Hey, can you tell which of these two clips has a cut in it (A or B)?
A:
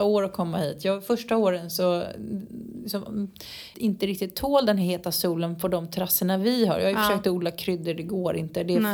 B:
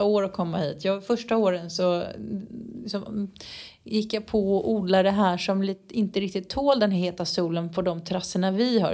A